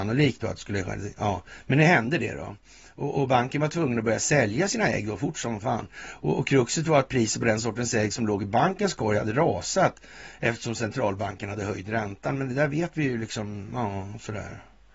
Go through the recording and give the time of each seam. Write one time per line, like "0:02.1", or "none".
none